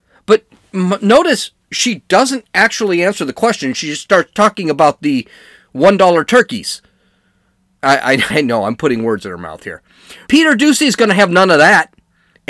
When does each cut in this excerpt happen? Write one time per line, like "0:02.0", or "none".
0:08.3
0:10.3